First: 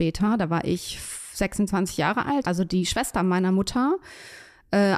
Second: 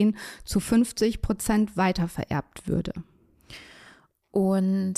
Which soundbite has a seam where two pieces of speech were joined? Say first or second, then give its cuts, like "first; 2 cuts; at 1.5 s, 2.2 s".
first; 1 cut; at 2.4 s